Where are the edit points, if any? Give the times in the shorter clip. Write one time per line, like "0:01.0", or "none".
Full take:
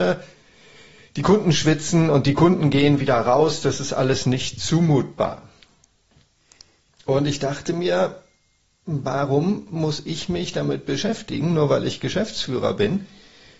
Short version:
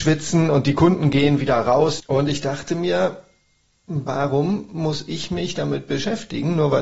0:02.0